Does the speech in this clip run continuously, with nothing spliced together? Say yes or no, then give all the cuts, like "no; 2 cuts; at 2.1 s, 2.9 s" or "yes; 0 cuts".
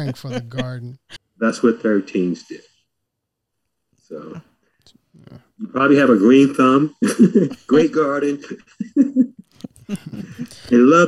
no; 1 cut; at 1.2 s